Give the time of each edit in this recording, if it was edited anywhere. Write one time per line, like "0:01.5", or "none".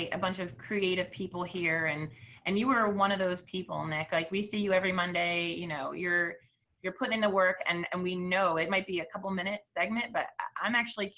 none